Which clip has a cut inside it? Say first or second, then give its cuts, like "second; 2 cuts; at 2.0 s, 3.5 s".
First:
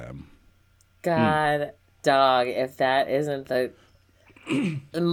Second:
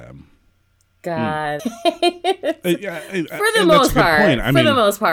second; 1 cut; at 1.6 s